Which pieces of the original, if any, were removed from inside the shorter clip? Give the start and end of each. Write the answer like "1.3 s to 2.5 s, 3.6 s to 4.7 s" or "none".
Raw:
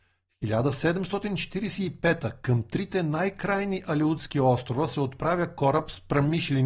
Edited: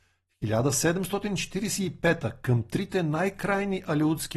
none